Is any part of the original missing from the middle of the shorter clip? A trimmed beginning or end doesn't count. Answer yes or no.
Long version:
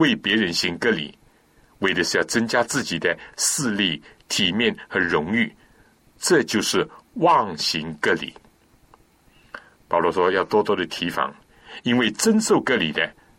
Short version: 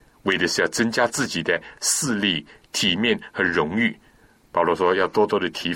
yes